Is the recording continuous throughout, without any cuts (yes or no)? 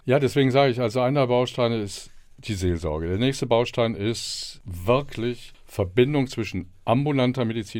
yes